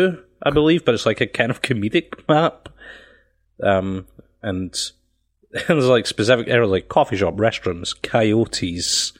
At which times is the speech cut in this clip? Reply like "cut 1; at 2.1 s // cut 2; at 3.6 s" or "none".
none